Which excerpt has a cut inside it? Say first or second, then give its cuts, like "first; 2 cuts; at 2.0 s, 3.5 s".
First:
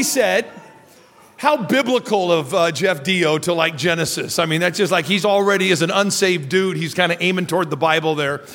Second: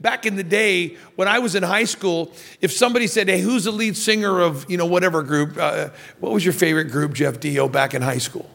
first; 1 cut; at 5.2 s